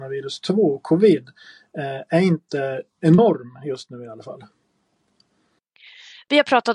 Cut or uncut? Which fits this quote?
uncut